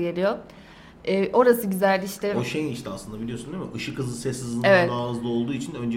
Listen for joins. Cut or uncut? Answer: uncut